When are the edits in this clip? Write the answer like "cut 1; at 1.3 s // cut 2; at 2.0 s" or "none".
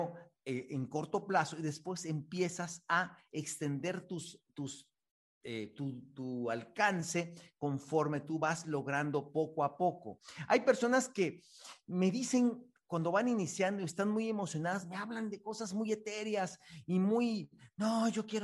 none